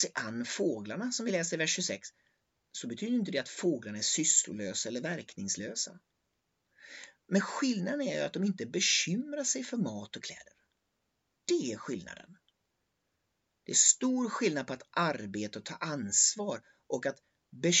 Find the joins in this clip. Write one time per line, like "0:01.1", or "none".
none